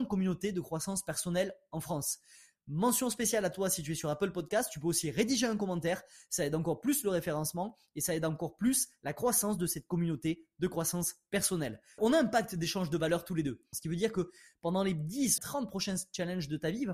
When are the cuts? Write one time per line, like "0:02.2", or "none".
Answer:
0:12.0
0:13.7
0:15.4